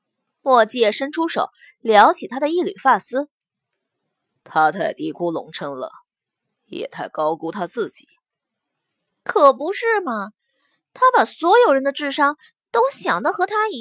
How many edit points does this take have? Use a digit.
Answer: 0